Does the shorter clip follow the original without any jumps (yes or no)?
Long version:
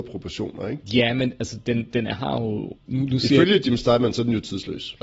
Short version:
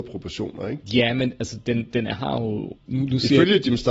yes